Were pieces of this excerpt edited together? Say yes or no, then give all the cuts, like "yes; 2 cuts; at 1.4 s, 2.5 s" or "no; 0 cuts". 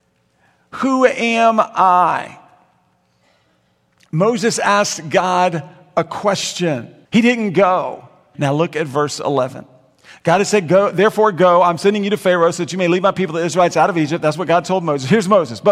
yes; 2 cuts; at 7.0 s, 8.3 s